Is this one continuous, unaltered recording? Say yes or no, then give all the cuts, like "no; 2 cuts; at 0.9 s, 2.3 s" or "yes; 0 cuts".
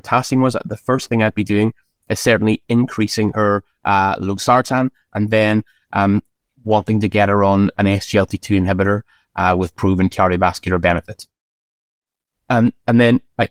yes; 0 cuts